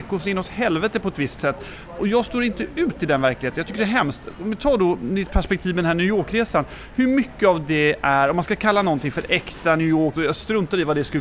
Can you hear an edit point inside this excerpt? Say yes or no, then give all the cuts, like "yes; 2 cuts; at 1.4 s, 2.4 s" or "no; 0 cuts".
yes; 1 cut; at 10.1 s